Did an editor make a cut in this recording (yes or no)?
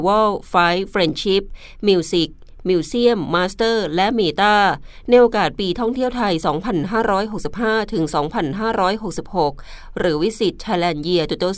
no